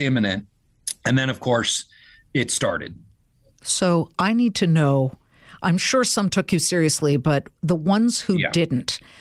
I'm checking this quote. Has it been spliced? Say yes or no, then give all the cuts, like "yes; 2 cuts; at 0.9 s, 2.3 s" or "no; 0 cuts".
no; 0 cuts